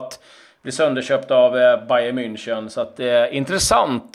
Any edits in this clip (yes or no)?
no